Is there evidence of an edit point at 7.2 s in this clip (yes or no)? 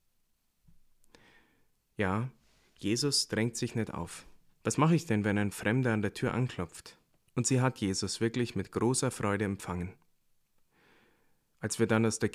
yes